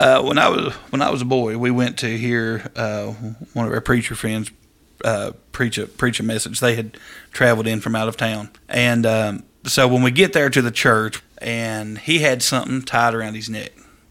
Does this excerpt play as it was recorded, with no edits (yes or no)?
no